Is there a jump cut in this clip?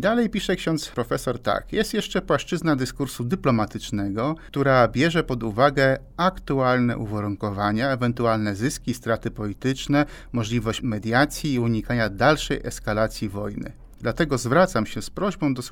yes; 1 cut; at 14.0 s

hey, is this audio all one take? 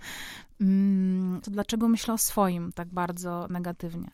no; 2 cuts; at 1.4 s, 2.7 s

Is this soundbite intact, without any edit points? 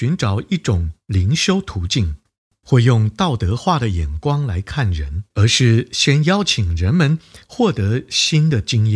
no; 2 cuts; at 2.6 s, 5.3 s

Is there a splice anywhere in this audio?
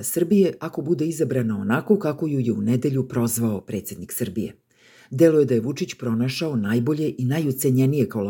no; 0 cuts

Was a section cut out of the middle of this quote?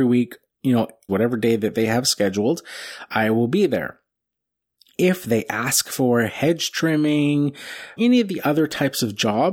yes; 2 cuts; at 1.1 s, 8.0 s

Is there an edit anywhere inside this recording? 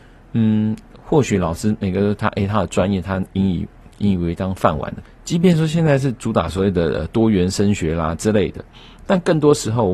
yes; 1 cut; at 5.0 s

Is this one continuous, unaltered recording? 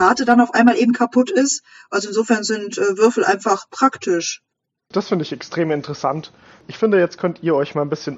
yes; 0 cuts

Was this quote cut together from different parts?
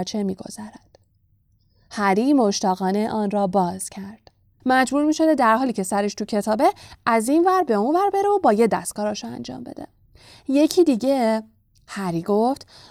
yes; 1 cut; at 4.6 s

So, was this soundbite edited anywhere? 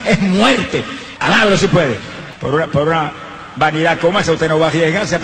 yes; 1 cut; at 2.3 s

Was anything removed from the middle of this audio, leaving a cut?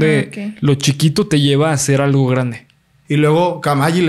yes; 1 cut; at 3.0 s

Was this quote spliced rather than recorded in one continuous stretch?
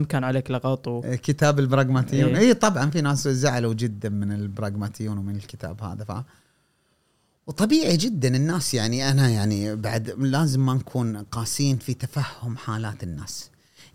no; 0 cuts

